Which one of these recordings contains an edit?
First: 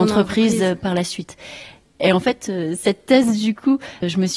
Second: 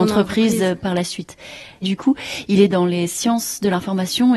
second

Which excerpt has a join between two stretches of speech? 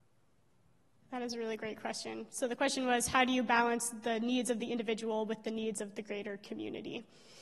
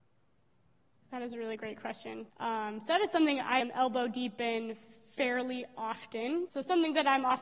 second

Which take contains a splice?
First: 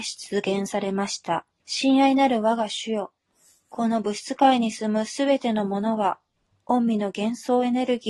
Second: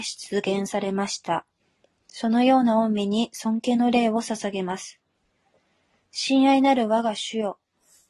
first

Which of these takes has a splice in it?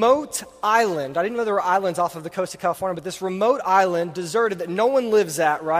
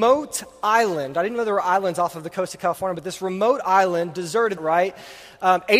second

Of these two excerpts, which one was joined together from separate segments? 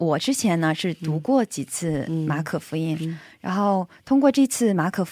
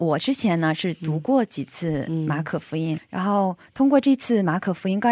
second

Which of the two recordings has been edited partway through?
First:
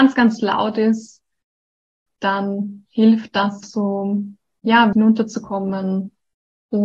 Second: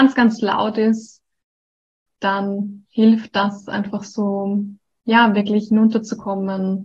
first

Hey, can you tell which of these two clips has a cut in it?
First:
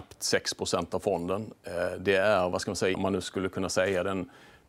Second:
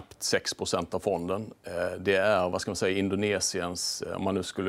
first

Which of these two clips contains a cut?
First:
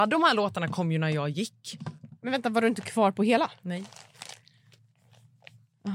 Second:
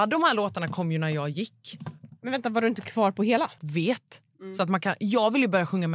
second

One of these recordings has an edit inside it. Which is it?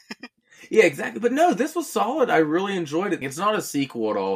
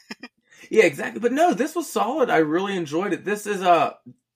first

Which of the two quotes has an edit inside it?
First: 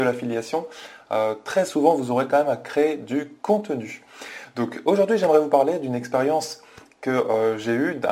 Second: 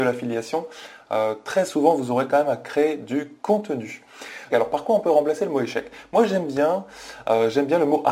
second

